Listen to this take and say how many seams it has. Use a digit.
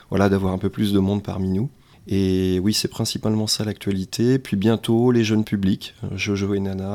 0